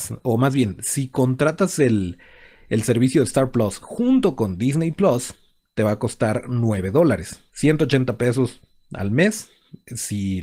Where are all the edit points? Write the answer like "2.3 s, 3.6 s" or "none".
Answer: 7.5 s